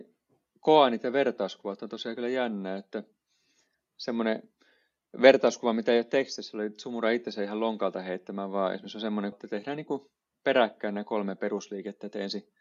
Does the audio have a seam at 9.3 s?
yes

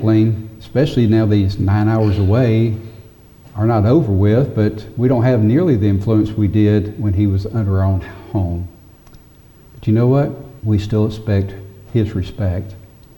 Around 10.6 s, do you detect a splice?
yes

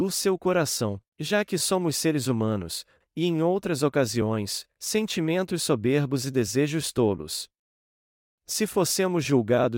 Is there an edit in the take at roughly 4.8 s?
yes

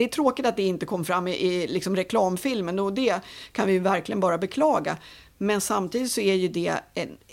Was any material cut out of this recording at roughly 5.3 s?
no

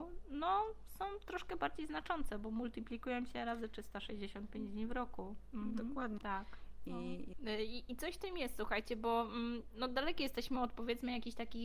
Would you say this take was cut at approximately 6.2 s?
yes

